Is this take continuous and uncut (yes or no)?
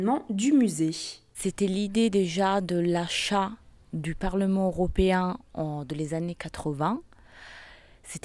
yes